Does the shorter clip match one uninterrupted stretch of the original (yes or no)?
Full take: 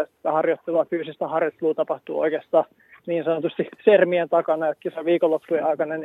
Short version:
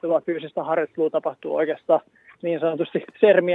yes